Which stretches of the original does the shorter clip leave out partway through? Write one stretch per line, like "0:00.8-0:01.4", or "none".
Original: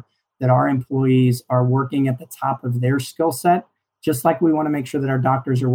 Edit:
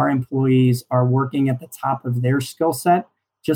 none

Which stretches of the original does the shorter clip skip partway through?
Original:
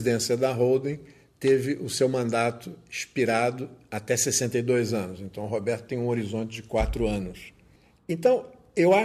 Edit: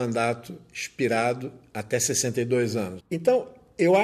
0:05.2-0:08.0

